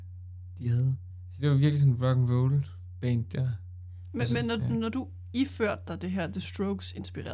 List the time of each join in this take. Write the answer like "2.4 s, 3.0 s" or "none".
none